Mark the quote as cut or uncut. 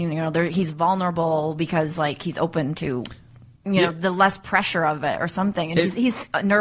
uncut